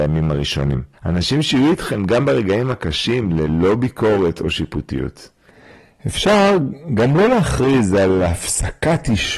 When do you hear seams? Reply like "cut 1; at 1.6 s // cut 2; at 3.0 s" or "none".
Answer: cut 1; at 0.9 s